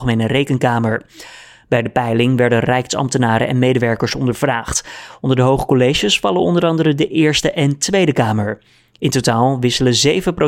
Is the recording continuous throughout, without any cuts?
yes; 0 cuts

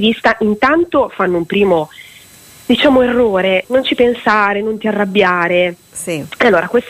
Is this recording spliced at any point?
yes; 1 cut; at 3.6 s

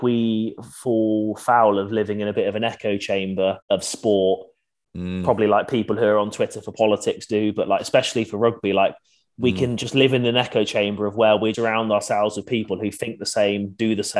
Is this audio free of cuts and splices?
no; 2 cuts; at 3.6 s, 11.5 s

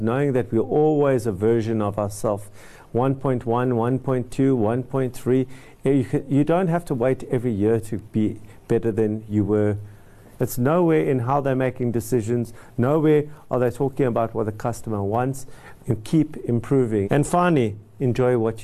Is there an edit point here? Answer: yes; 3 cuts; at 10.3 s, 15.8 s, 17.0 s

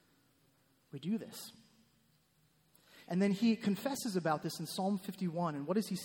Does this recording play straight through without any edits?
no; 1 cut; at 3.1 s

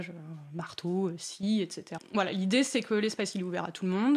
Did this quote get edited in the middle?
yes; 1 cut; at 2.0 s

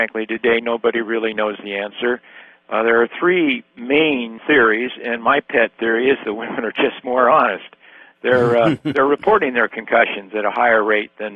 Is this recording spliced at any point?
yes; 1 cut; at 4.4 s

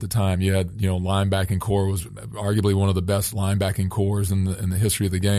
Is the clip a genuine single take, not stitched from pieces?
yes; 0 cuts

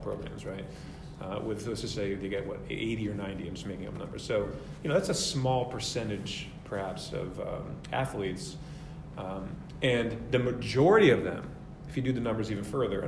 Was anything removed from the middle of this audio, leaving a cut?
no; 0 cuts

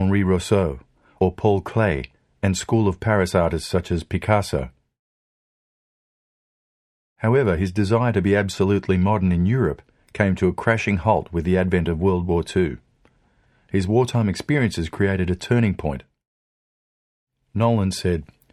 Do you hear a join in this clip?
no; 0 cuts

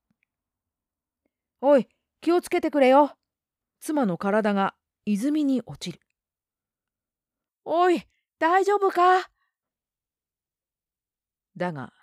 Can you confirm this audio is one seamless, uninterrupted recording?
no; 1 cut; at 3.6 s

